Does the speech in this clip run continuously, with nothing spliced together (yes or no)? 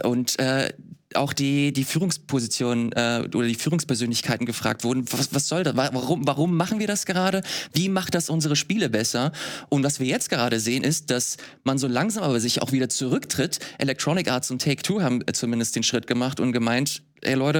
yes